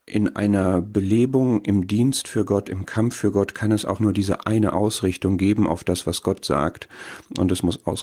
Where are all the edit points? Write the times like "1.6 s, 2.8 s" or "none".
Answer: 4.0 s